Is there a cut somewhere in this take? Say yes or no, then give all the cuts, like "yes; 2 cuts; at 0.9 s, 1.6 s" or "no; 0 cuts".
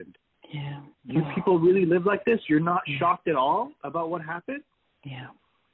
yes; 1 cut; at 0.9 s